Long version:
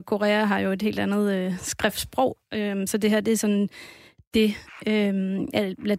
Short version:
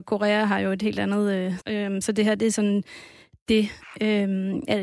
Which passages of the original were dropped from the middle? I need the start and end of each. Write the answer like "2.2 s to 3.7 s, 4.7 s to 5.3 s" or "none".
1.6 s to 2.5 s